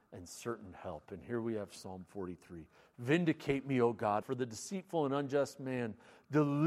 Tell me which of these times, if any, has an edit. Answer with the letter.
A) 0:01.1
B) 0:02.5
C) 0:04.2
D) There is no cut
C